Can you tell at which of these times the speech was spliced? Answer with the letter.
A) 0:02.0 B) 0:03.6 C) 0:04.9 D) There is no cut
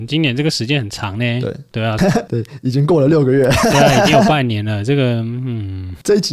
A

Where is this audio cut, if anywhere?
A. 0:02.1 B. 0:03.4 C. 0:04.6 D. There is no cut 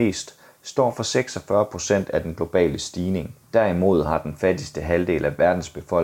B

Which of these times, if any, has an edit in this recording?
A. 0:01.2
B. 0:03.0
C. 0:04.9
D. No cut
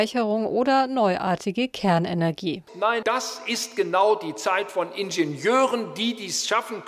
B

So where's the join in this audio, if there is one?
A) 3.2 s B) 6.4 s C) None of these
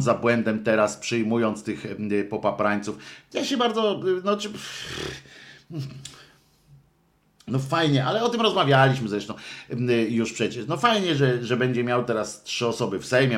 C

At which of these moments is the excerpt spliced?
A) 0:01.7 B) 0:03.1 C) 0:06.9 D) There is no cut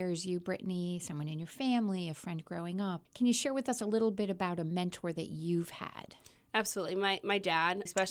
D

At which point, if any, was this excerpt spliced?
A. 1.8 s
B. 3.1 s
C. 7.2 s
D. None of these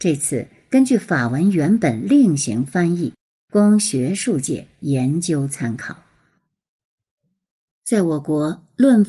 D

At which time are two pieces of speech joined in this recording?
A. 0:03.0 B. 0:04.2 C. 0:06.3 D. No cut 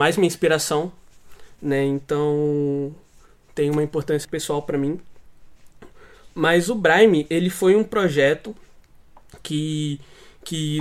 B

